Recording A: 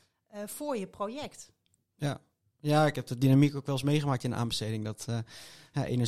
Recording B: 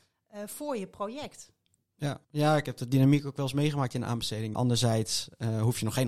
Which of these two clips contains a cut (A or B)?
B